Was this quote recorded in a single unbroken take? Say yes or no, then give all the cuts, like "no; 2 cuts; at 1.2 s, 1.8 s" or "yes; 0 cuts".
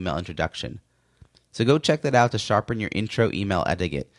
yes; 0 cuts